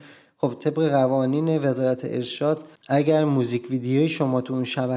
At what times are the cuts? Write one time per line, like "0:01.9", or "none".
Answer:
0:02.8